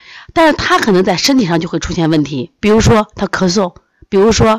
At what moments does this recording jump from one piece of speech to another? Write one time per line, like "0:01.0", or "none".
0:02.6